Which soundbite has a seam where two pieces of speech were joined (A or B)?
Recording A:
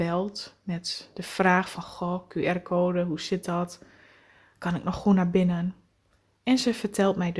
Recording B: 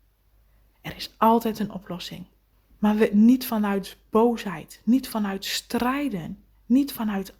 B